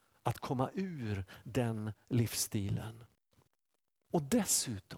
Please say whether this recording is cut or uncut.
cut